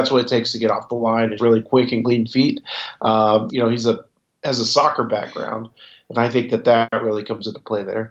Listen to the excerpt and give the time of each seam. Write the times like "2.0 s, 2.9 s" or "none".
1.4 s, 3.5 s